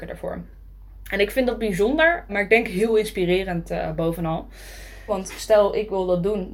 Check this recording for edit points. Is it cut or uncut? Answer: cut